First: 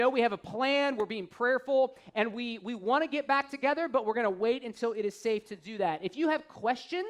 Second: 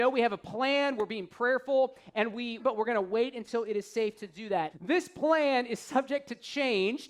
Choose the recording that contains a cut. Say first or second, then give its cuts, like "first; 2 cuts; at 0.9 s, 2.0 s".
second; 2 cuts; at 2.6 s, 4.7 s